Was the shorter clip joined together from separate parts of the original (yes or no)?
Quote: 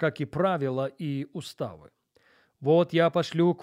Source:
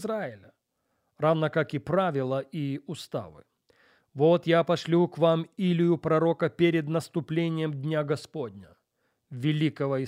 no